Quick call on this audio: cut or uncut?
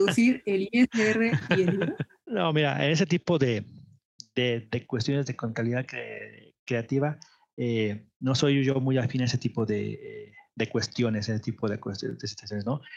uncut